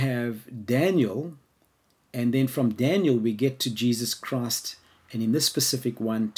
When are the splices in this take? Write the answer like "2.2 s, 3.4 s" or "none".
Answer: none